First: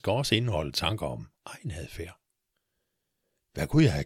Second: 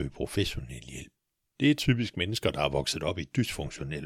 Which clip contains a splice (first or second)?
second